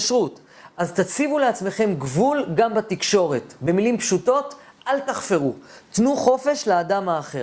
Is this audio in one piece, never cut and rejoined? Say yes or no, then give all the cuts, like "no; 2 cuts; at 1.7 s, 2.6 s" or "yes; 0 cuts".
yes; 0 cuts